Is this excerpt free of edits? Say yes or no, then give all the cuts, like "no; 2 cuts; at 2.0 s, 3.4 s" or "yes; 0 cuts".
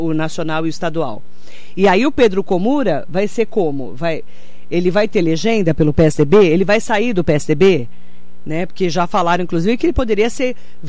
yes; 0 cuts